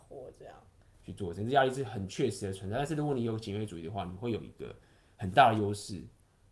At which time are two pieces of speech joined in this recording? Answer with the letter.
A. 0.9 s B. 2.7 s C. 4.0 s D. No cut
A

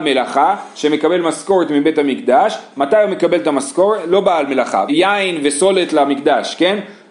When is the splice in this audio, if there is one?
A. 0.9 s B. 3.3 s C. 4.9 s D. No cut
C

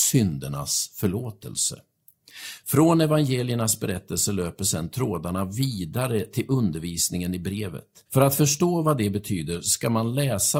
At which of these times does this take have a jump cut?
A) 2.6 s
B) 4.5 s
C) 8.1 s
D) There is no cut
C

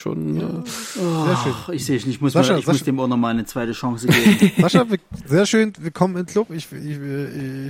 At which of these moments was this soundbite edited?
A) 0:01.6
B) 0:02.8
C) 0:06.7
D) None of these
D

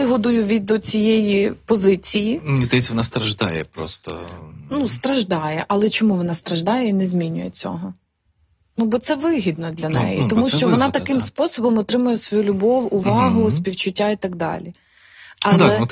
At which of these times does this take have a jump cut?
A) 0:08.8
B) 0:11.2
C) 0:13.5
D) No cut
D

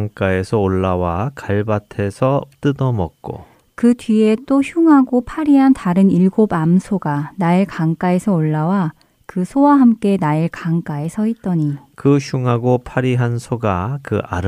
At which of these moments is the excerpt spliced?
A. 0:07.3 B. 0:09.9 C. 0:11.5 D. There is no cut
D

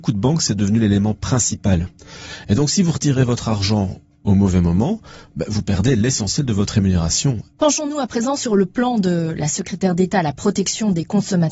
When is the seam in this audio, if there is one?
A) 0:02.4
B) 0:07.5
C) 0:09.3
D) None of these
B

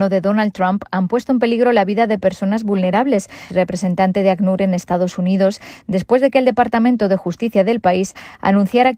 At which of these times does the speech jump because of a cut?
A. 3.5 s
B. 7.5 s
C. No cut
A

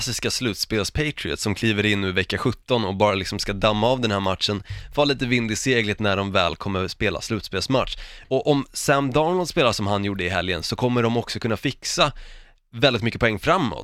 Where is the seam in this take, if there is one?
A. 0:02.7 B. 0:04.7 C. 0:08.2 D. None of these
C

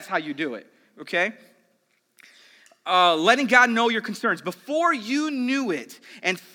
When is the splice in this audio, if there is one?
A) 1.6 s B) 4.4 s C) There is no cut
C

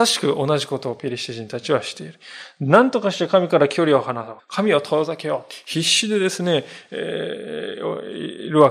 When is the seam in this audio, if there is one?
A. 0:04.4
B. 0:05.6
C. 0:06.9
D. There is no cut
A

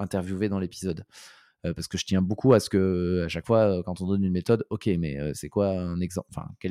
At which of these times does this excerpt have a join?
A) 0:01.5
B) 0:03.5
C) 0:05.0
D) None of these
D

